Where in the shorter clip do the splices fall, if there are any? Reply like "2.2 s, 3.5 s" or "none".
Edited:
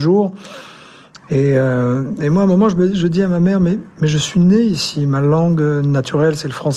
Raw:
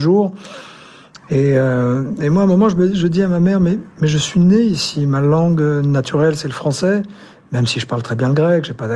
none